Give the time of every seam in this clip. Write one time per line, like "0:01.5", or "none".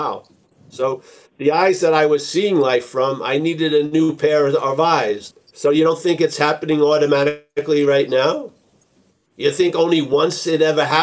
0:05.3